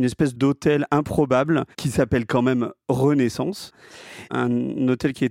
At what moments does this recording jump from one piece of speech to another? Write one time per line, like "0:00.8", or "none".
0:01.7